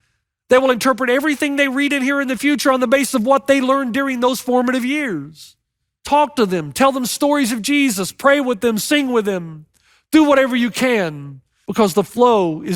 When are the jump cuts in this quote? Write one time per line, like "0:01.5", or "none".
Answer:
none